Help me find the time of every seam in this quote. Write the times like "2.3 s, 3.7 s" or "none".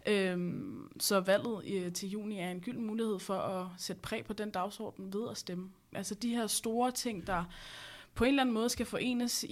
5.9 s